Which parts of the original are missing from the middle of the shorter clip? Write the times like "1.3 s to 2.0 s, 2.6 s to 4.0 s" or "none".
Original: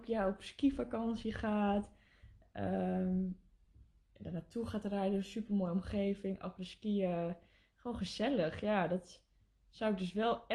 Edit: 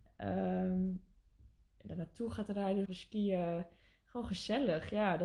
5.2 s to 6.5 s